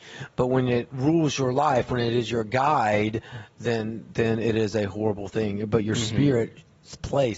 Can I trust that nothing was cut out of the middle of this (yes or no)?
yes